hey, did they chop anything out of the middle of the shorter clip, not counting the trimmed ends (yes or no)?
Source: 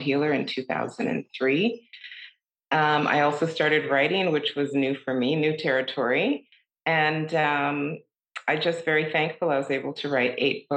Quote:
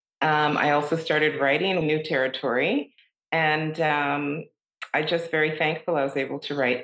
yes